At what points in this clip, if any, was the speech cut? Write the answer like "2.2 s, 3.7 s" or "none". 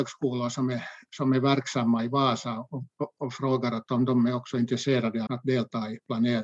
5.3 s

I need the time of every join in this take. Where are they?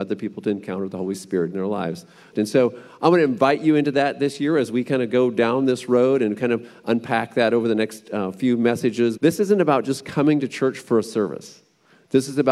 2.3 s, 9.2 s

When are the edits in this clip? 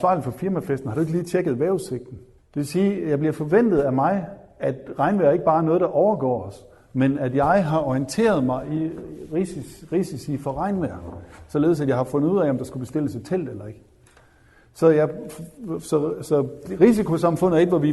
2.4 s

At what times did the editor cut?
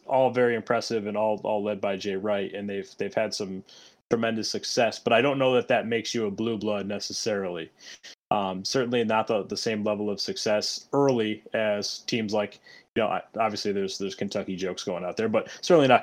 none

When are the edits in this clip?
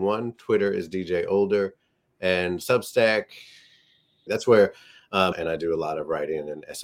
4.3 s, 5.3 s

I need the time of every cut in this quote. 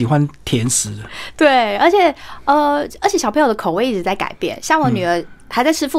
none

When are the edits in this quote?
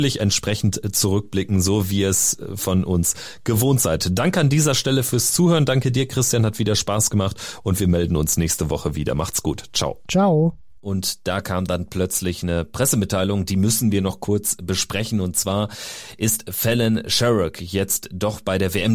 10.8 s

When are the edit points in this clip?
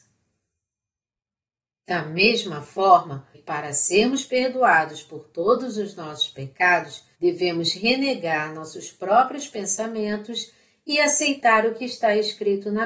3.3 s, 7.1 s

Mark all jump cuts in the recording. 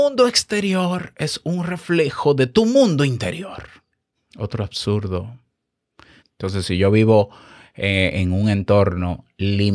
4.1 s, 6.2 s

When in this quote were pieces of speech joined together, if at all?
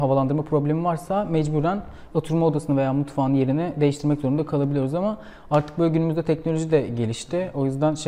none

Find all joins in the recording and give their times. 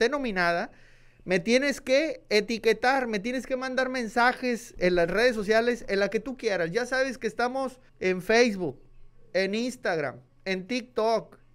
7.9 s

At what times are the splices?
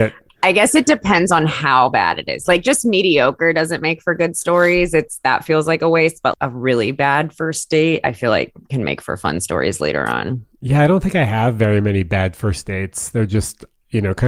6.3 s

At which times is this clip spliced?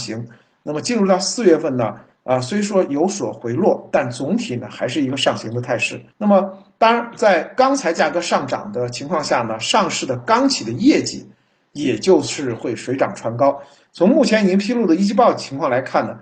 6.1 s

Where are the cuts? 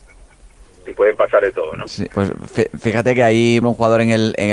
2.1 s, 3.6 s

